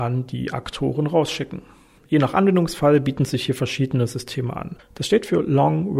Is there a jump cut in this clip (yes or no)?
yes